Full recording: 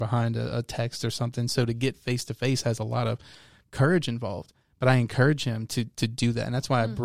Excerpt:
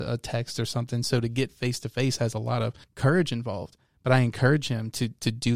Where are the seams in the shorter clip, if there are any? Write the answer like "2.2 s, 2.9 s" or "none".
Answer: 2.8 s